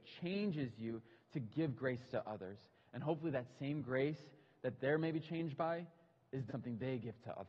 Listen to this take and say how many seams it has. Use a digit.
1